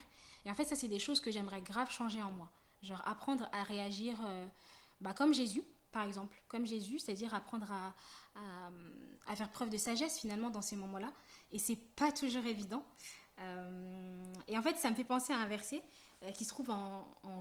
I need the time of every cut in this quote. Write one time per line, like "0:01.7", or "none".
none